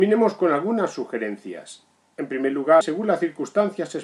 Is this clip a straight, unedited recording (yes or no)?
no